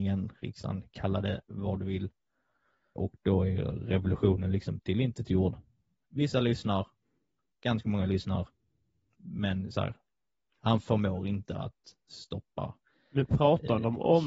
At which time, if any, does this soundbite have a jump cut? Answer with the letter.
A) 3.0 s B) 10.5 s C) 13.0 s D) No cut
A